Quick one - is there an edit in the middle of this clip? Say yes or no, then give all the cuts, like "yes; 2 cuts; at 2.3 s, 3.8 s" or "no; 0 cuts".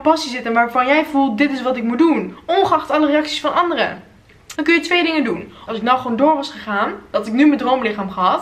yes; 2 cuts; at 4.5 s, 5.7 s